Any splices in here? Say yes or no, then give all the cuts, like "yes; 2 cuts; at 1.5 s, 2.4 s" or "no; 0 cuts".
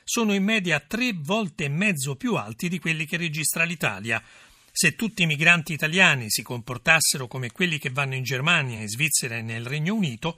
no; 0 cuts